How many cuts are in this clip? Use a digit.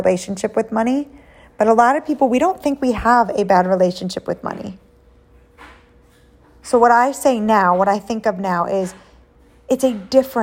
0